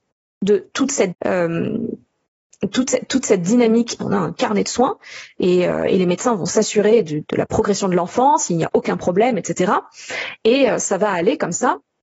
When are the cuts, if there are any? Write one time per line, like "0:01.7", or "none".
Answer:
0:01.1
0:04.0
0:07.2